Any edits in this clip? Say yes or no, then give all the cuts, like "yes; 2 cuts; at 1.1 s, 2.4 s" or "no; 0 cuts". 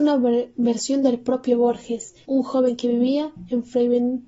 yes; 1 cut; at 2.2 s